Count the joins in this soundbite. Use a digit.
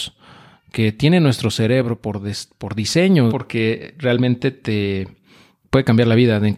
1